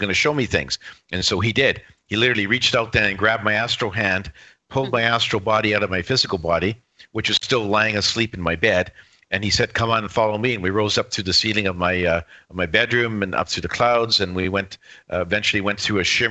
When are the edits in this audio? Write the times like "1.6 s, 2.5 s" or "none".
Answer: none